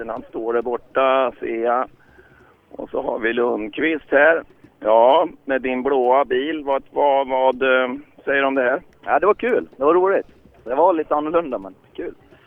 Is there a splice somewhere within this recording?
no; 0 cuts

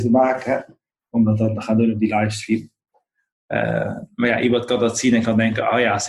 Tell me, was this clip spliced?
no; 0 cuts

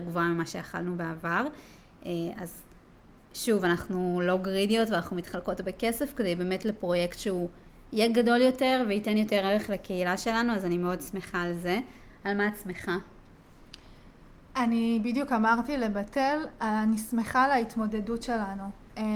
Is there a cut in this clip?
no; 0 cuts

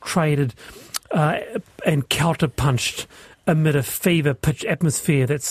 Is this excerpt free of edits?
yes; 0 cuts

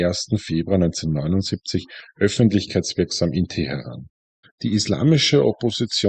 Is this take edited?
yes; 1 cut; at 4.4 s

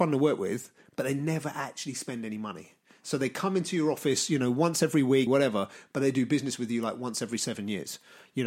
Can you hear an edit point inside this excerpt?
yes; 1 cut; at 5.3 s

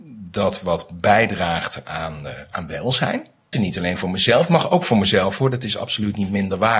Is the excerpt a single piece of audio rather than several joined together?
no; 1 cut; at 3.5 s

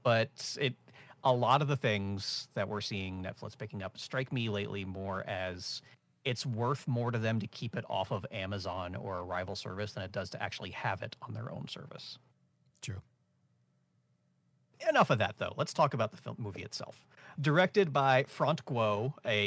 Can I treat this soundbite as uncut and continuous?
no; 1 cut; at 17.4 s

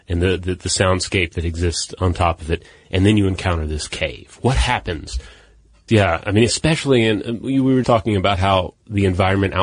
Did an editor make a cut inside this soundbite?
yes; 2 cuts; at 5.9 s, 7.8 s

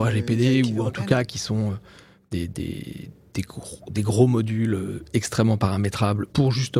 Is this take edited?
yes; 1 cut; at 2.5 s

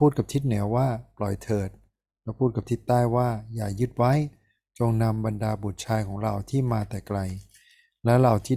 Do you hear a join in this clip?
no; 0 cuts

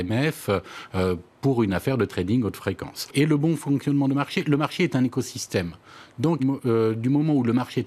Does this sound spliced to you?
yes; 2 cuts; at 3.1 s, 6.4 s

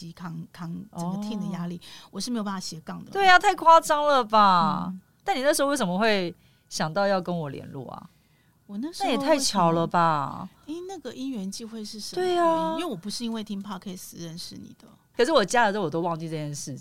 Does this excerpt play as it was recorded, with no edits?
no; 2 cuts; at 3.1 s, 15.1 s

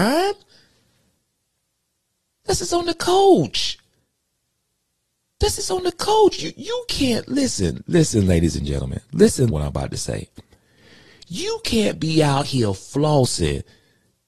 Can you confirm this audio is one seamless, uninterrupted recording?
no; 2 cuts; at 7.8 s, 9.5 s

